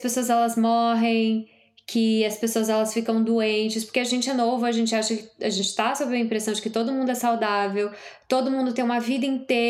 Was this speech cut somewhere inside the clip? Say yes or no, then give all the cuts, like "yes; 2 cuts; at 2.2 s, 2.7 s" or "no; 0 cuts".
no; 0 cuts